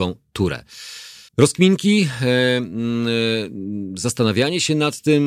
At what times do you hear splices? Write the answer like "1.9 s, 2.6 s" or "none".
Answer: 1.3 s